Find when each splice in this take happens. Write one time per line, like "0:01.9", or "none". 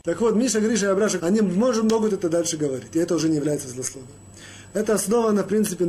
0:01.2

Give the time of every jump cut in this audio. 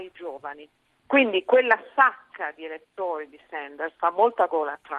0:01.0

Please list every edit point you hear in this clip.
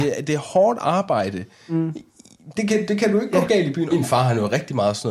0:02.6
0:03.9

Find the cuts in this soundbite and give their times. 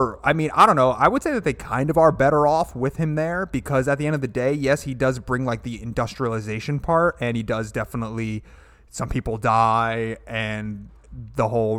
none

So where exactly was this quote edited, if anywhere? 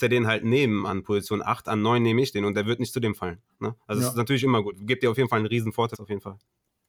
0:01.7
0:05.9

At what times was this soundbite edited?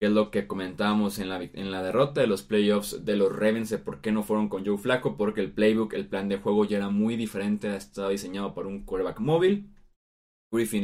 none

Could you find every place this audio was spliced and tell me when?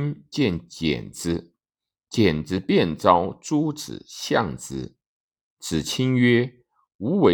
none

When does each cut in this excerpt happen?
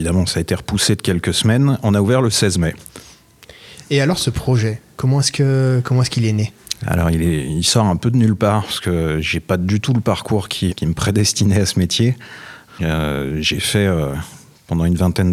0:10.7
0:12.7

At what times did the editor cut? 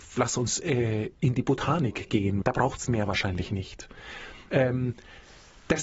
0:02.4
0:04.5

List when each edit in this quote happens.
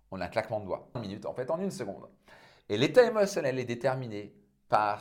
0:01.0

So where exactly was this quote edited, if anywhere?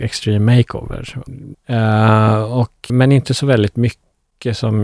0:01.5
0:02.9

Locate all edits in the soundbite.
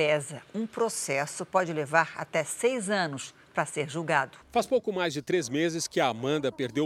0:04.4

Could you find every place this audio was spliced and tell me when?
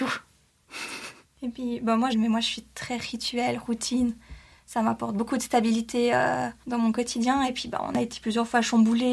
0:02.1

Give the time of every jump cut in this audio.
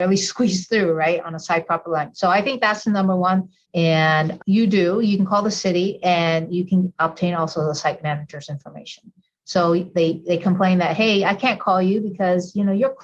0:03.6

